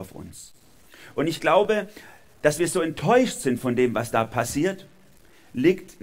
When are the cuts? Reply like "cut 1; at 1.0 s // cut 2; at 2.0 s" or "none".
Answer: none

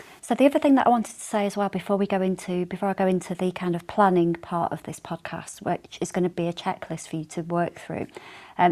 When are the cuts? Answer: cut 1; at 6.3 s

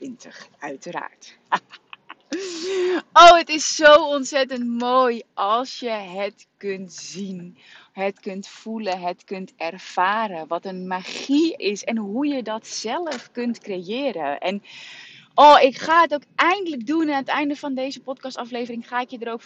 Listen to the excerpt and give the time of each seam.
cut 1; at 11.6 s

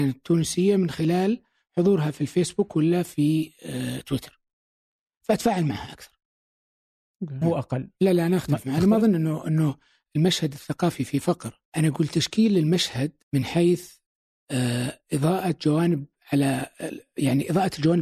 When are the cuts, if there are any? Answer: cut 1; at 7.4 s // cut 2; at 11.7 s // cut 3; at 13.2 s

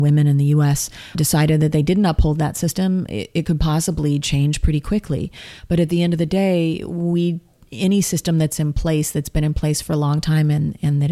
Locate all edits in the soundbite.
cut 1; at 1.1 s

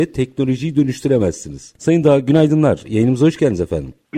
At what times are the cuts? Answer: cut 1; at 1.8 s

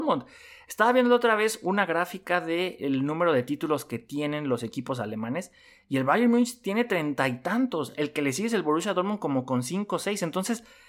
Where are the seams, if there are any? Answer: none

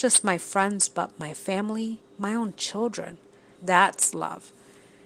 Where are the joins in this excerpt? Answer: cut 1; at 3.5 s

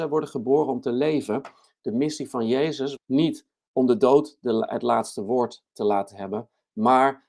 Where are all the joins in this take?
cut 1; at 3.0 s

